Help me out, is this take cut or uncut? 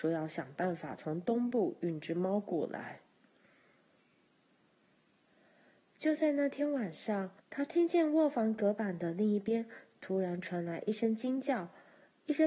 cut